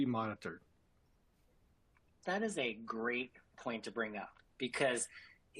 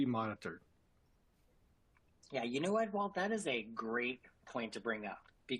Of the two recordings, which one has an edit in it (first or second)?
first